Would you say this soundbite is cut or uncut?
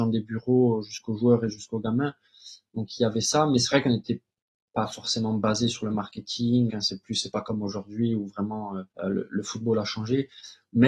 cut